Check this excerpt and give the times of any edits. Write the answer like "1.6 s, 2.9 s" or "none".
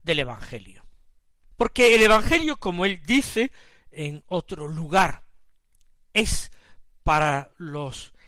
none